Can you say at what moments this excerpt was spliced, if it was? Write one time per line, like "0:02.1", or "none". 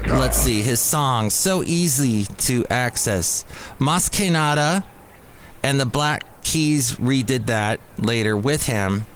none